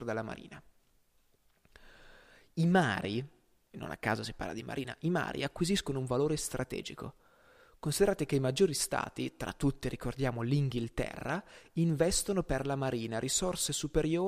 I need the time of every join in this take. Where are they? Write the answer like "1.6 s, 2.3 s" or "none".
none